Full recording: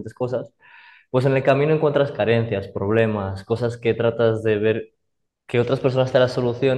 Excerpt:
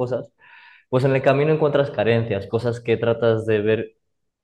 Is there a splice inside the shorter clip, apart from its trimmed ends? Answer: yes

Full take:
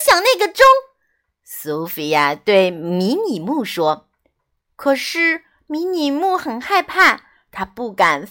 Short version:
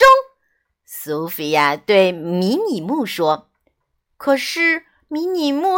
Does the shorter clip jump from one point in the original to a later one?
no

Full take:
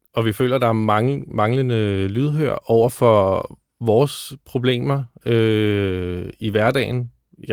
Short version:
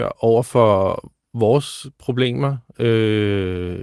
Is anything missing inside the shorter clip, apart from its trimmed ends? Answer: no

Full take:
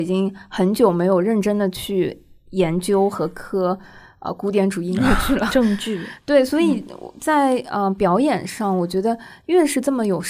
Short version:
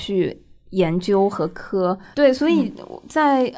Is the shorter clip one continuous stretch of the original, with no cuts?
no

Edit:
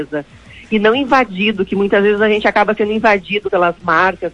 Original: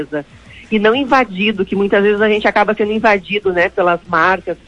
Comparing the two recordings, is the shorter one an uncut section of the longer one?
no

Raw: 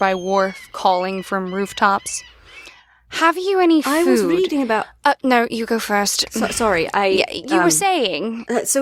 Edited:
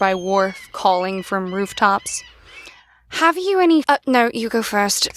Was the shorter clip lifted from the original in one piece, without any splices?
no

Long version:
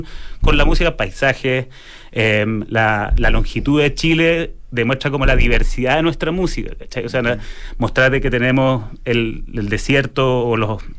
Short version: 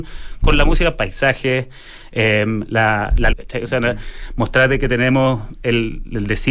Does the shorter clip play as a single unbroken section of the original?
no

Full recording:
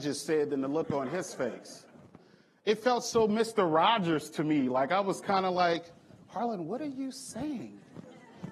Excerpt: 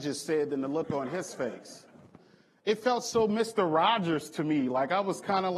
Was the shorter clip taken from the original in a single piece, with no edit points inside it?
yes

